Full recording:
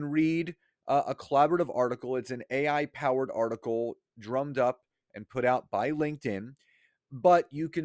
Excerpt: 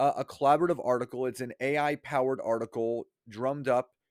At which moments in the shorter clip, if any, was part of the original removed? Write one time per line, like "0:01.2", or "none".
none